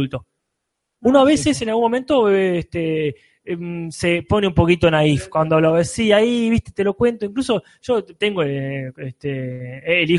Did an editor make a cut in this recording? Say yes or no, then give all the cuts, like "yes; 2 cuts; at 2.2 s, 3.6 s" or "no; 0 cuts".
no; 0 cuts